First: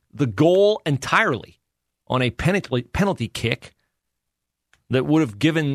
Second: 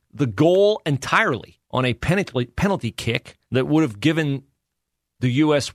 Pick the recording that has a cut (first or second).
second